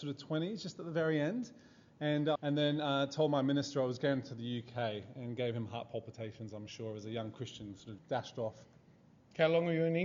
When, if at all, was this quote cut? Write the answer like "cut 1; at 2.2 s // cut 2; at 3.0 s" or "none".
cut 1; at 2.4 s // cut 2; at 8.0 s